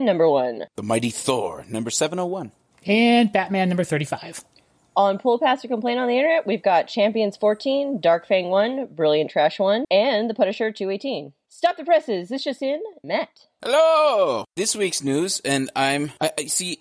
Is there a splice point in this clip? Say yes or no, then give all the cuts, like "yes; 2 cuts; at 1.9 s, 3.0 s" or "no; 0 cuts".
yes; 2 cuts; at 9.8 s, 13.0 s